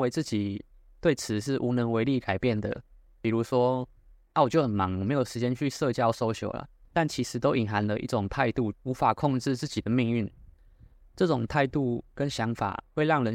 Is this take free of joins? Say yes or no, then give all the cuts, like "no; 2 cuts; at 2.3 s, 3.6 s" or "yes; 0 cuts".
no; 2 cuts; at 6.8 s, 8.7 s